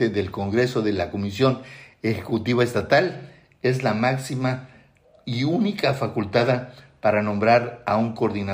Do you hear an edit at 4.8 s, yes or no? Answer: no